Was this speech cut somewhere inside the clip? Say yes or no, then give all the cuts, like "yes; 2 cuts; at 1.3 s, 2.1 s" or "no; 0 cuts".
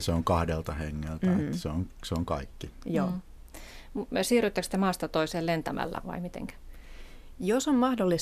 yes; 1 cut; at 6.0 s